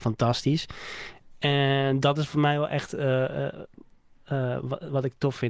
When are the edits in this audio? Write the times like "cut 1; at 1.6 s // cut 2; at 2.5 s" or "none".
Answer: none